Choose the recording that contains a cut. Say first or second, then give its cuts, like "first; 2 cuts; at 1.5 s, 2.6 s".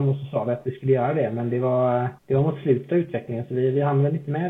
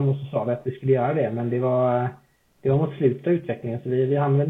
first; 1 cut; at 2.2 s